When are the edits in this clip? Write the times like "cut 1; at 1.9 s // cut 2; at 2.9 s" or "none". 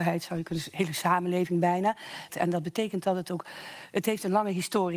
cut 1; at 2.3 s